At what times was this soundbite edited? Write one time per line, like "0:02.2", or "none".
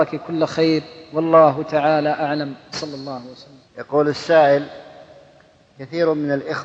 0:03.7